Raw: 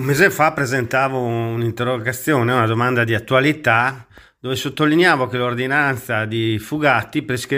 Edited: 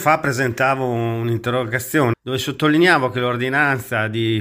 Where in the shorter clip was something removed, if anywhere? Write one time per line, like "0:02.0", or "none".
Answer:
0:02.1